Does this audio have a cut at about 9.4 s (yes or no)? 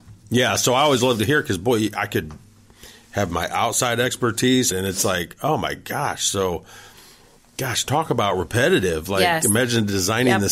no